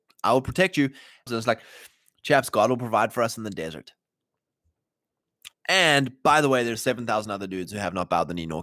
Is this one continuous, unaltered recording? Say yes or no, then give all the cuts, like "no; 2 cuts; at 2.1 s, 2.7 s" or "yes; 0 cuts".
no; 2 cuts; at 1.3 s, 5.5 s